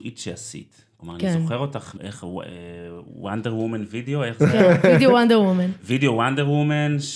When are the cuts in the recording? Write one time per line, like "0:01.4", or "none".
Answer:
0:02.0